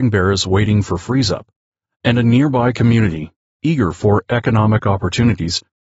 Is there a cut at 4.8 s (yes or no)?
no